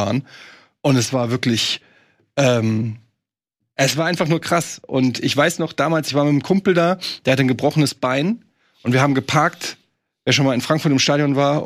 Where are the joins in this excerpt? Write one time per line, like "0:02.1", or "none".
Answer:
none